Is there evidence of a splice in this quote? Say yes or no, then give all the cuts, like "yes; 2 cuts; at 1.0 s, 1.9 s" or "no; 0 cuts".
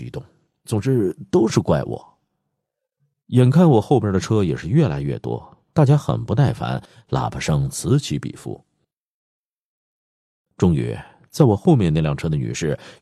no; 0 cuts